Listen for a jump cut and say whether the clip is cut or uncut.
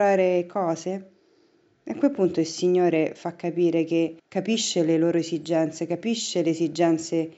cut